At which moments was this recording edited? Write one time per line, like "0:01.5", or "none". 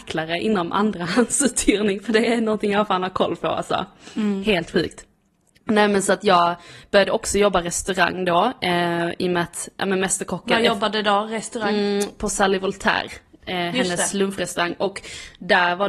none